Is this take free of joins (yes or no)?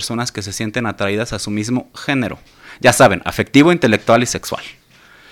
yes